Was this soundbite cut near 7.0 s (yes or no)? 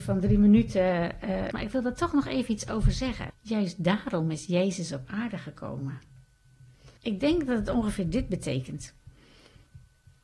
yes